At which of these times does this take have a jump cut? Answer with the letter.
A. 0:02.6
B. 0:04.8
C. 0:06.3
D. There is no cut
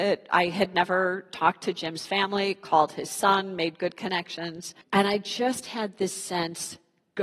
B